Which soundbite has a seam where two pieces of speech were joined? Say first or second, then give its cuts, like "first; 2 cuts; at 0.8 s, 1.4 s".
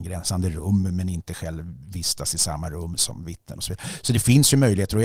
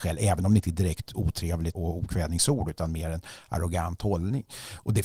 second; 1 cut; at 1.7 s